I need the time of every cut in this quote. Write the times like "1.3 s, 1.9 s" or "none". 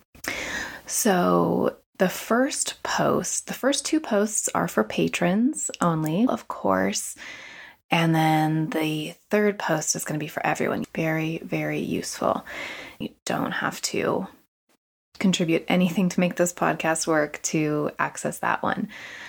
6.3 s, 10.8 s, 13.0 s